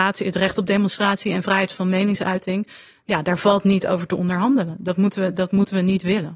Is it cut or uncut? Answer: uncut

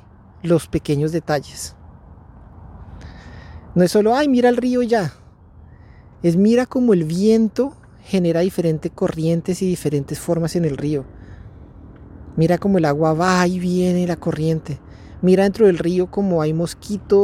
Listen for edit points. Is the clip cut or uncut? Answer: uncut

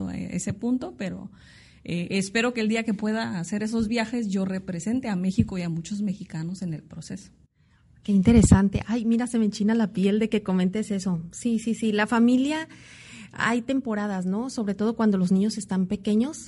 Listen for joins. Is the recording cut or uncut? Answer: uncut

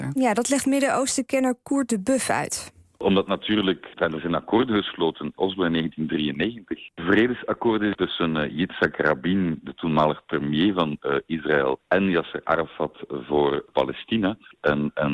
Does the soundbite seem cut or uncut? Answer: uncut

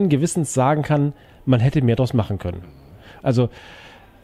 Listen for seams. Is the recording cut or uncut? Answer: cut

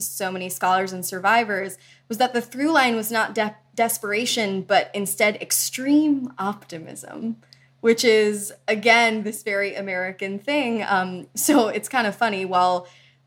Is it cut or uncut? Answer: uncut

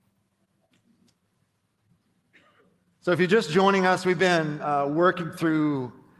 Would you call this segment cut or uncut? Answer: uncut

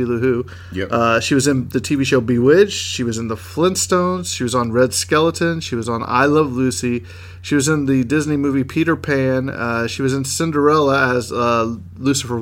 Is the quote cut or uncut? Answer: uncut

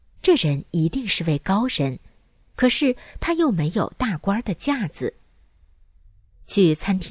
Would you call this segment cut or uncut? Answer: uncut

